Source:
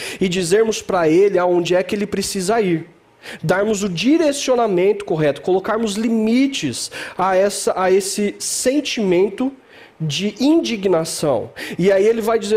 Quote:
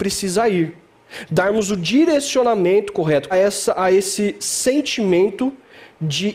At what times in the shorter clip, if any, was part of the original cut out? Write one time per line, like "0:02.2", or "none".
0:03.3

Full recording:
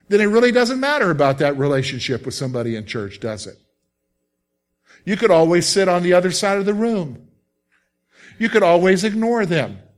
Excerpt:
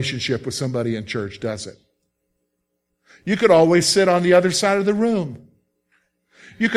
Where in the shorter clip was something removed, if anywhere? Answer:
none

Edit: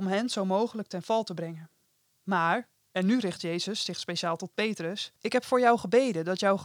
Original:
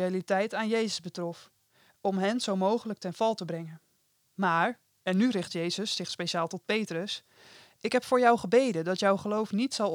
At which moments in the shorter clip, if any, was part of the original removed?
0:05.2

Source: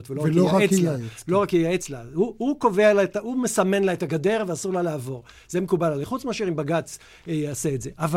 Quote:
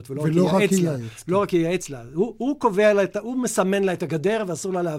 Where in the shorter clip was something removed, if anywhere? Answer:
none

